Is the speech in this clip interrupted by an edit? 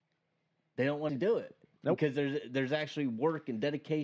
yes; 1 cut; at 1.1 s

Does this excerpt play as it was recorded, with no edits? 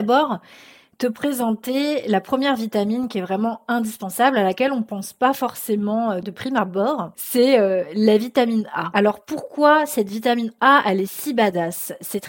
yes; 0 cuts

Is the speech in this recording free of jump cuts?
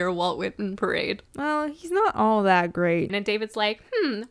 no; 1 cut; at 3.1 s

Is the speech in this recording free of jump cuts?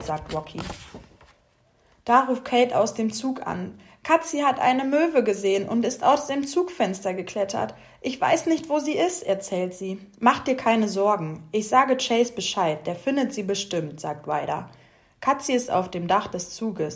yes; 0 cuts

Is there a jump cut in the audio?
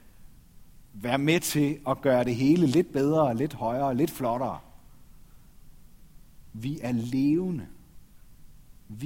no; 0 cuts

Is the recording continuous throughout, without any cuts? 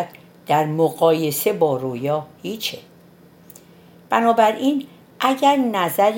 yes; 0 cuts

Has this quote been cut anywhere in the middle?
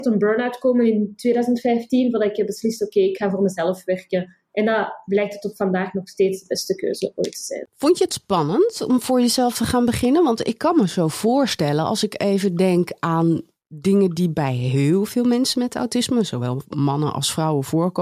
no; 0 cuts

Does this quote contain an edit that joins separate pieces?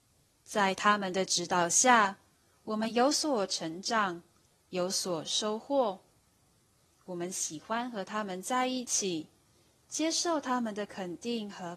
no; 0 cuts

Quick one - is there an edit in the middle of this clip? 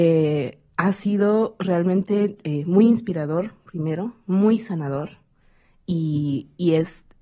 no; 0 cuts

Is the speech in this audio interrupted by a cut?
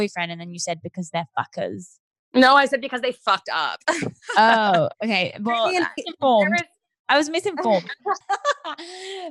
yes; 2 cuts; at 6.0 s, 8.2 s

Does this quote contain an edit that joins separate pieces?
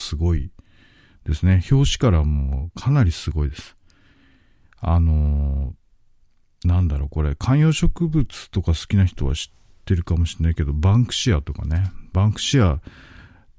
no; 0 cuts

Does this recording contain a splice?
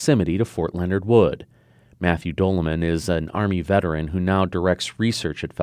no; 0 cuts

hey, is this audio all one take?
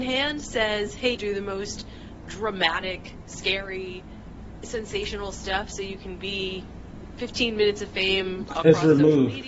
no; 1 cut; at 1.1 s

